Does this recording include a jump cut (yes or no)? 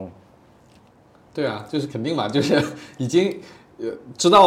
yes